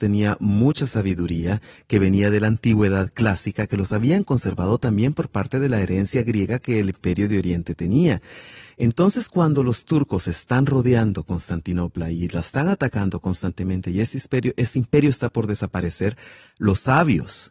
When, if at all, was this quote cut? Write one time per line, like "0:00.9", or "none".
none